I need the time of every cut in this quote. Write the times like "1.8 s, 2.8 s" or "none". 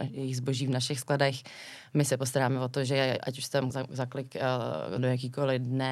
3.7 s, 5.0 s